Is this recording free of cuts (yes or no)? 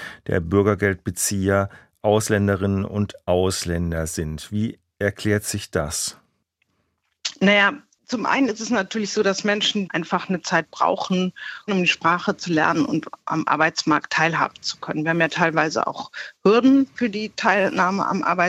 no